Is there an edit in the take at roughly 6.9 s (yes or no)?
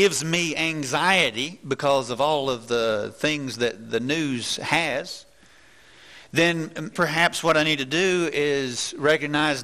yes